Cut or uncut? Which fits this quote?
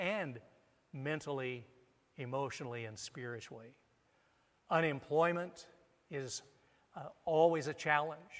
uncut